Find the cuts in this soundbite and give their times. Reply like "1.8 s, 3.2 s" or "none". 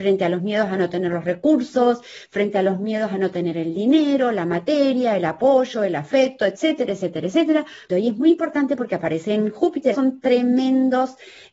7.9 s, 9.9 s